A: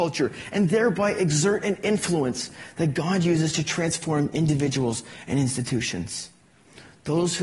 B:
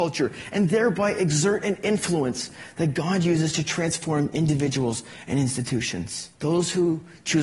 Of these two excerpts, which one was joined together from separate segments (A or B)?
B